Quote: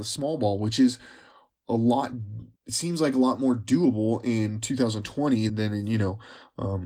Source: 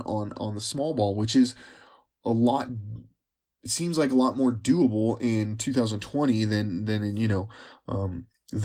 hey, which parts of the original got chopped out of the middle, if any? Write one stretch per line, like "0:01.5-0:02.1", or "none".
0:03.1-0:03.5
0:06.5-0:06.8